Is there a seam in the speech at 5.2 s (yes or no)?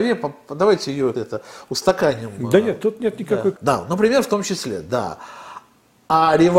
no